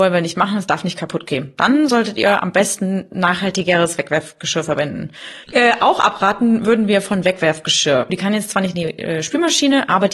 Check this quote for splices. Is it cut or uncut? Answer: cut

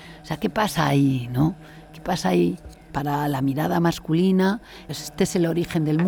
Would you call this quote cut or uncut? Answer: cut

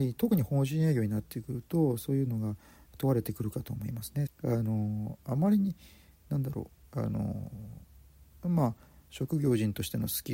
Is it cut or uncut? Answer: cut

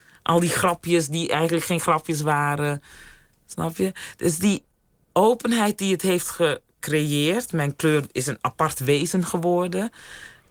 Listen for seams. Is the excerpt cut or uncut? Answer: uncut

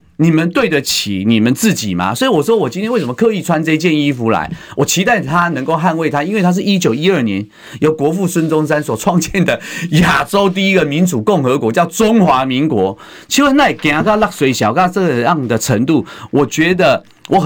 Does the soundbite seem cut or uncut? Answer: uncut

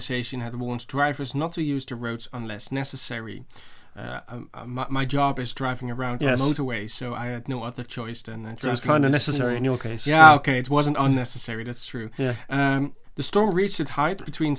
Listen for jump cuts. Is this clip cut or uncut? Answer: uncut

